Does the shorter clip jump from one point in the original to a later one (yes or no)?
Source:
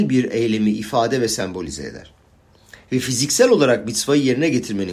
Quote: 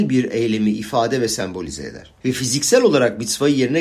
yes